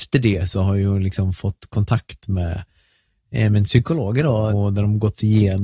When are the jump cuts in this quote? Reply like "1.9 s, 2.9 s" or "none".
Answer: 4.5 s